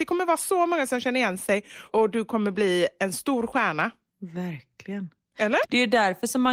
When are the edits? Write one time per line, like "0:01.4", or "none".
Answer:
0:05.6